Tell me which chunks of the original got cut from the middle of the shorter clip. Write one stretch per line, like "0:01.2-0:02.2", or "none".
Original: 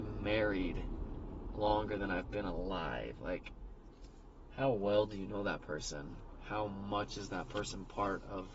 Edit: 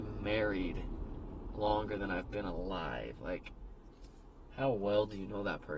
none